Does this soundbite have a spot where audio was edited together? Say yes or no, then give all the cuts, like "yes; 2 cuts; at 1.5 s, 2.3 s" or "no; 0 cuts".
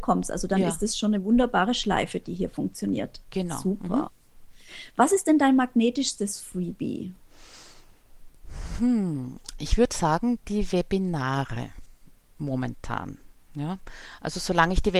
no; 0 cuts